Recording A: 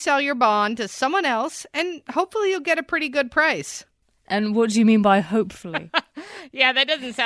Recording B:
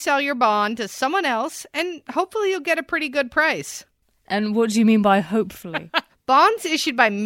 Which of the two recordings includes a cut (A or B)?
B